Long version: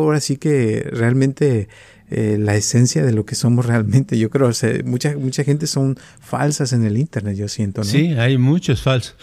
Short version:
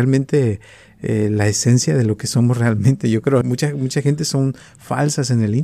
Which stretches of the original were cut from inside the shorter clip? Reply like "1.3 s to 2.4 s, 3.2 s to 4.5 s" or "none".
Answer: 4.5 s to 4.8 s